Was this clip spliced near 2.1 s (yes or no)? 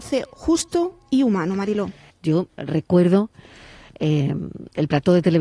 yes